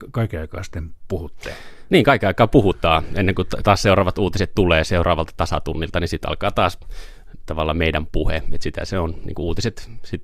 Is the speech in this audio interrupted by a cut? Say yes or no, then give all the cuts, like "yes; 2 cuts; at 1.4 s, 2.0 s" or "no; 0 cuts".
no; 0 cuts